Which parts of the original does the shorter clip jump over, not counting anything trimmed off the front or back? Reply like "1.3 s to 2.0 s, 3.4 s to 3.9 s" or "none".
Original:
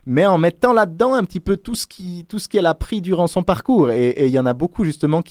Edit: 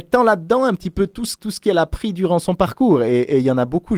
1.9 s to 2.3 s